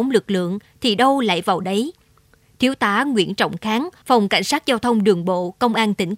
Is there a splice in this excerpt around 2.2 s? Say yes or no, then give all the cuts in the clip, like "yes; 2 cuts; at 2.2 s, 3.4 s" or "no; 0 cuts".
no; 1 cut; at 4.0 s